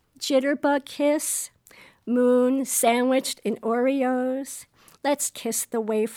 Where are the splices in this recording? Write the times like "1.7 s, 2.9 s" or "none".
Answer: none